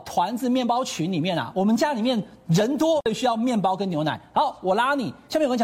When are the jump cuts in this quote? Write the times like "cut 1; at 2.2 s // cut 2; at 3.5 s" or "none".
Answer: none